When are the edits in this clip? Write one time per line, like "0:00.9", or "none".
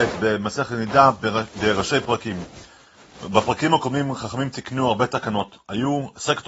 none